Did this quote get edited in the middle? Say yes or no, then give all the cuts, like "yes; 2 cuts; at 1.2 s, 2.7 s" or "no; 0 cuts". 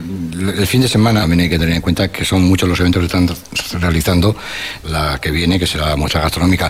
yes; 2 cuts; at 1.2 s, 4.8 s